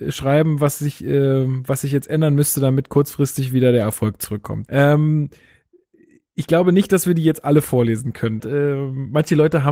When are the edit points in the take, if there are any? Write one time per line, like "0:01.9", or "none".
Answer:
0:04.7
0:08.4